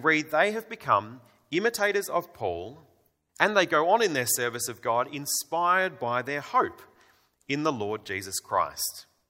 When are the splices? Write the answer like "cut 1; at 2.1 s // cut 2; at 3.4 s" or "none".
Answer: cut 1; at 3.3 s